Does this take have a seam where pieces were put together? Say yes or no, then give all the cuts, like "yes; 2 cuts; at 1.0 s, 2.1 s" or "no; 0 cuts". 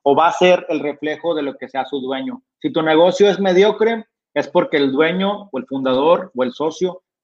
no; 0 cuts